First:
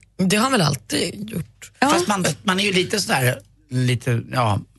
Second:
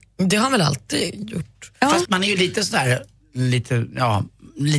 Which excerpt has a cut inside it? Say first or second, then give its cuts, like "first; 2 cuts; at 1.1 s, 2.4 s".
second; 1 cut; at 2.1 s